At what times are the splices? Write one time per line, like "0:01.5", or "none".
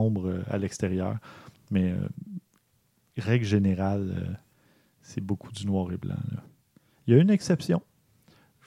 none